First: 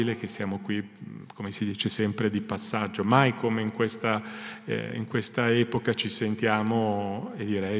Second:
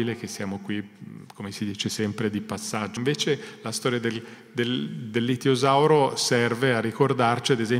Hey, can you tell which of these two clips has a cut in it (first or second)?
second